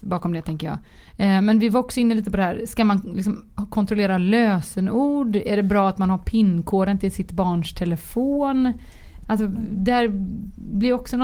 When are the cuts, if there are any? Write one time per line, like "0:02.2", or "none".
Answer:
0:09.2